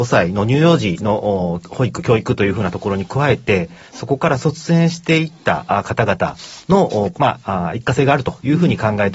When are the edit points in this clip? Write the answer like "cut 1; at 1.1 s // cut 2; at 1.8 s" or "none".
cut 1; at 7.1 s